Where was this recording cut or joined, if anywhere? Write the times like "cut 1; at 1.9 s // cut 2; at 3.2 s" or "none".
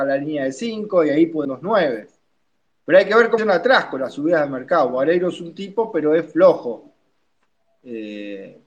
none